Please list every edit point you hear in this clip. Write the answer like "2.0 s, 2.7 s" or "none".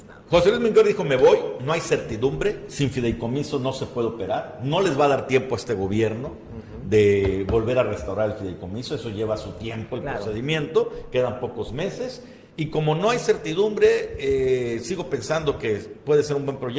none